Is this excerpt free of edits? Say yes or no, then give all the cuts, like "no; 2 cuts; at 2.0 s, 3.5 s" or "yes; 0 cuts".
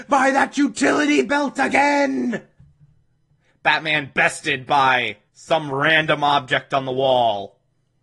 no; 2 cuts; at 3.5 s, 5.3 s